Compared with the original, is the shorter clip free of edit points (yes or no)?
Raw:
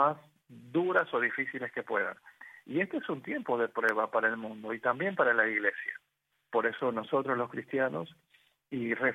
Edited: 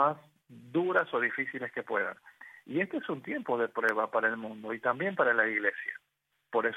yes